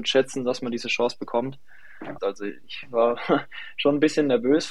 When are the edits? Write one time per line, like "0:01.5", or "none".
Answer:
0:02.2